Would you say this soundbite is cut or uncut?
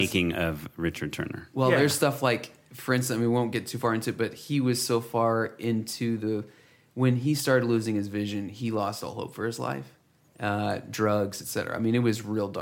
uncut